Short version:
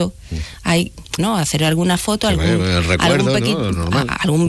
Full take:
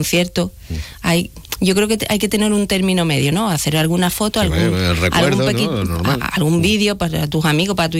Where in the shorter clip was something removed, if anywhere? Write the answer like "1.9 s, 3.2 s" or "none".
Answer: 1.2 s